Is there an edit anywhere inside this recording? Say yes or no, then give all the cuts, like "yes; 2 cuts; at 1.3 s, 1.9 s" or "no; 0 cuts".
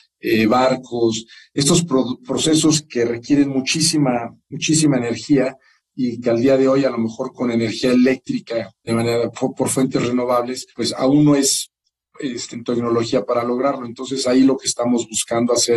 yes; 3 cuts; at 8.9 s, 10.7 s, 12.5 s